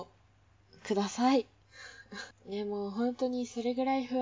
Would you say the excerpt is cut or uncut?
cut